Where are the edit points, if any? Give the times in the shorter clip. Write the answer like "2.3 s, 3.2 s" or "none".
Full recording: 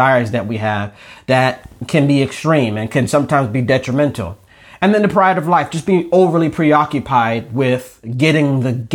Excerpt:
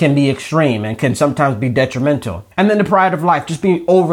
2.5 s